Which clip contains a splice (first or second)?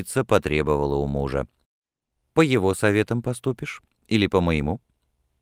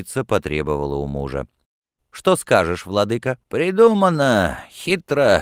second